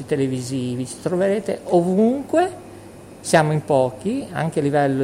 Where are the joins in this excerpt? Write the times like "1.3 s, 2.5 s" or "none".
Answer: 3.2 s